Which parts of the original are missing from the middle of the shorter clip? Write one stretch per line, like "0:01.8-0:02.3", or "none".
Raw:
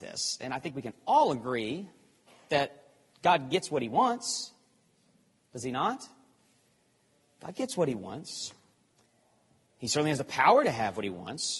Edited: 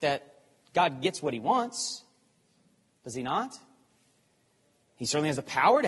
0:07.3-0:09.6